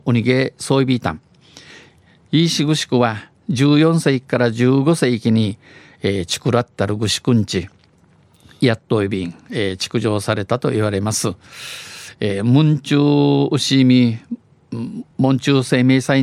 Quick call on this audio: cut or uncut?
uncut